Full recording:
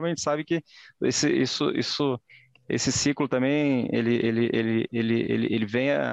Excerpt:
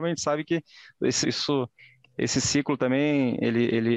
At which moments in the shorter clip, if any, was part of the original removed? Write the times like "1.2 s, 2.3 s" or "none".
1.2 s

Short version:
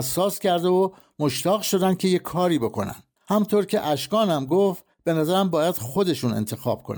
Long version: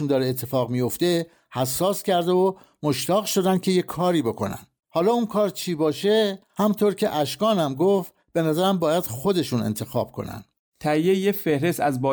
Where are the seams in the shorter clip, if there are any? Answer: 3.2 s

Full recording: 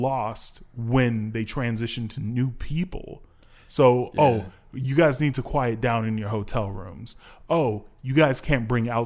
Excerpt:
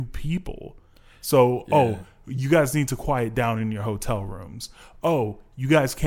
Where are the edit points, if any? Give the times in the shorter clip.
none

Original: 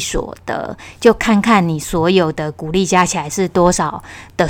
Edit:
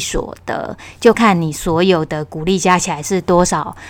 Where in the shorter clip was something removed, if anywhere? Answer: 1.1 s

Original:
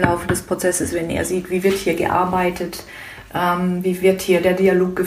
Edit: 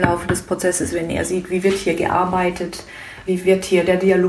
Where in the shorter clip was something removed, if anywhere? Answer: 3.3 s

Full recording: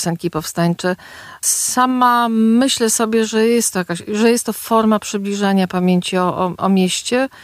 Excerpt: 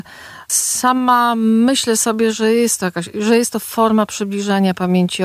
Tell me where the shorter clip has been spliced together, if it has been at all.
none

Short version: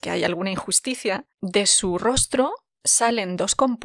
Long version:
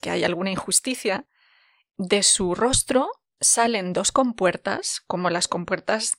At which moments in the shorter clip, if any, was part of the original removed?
1.3 s

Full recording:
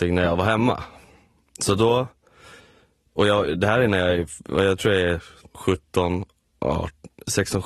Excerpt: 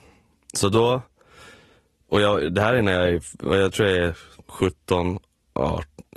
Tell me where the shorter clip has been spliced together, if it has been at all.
none

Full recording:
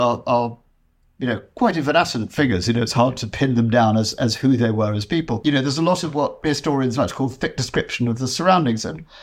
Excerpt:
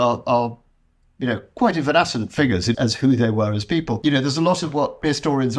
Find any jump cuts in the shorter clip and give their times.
2.7 s

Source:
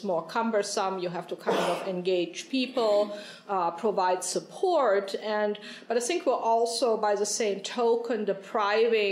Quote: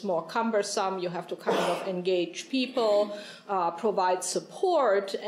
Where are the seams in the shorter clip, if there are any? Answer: none

